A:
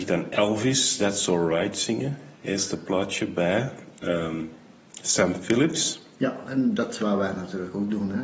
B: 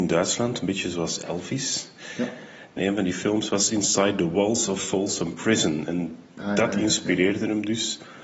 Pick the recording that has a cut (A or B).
B